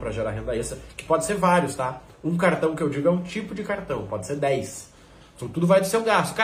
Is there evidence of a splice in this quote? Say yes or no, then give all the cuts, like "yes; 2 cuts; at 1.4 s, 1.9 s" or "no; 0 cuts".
no; 0 cuts